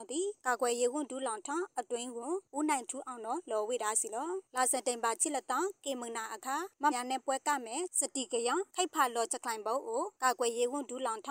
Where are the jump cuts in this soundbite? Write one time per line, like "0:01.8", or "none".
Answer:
0:06.9